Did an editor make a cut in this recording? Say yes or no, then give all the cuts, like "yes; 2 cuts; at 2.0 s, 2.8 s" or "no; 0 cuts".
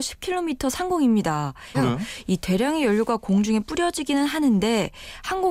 yes; 1 cut; at 1.7 s